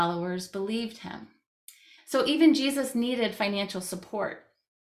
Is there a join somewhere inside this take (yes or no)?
yes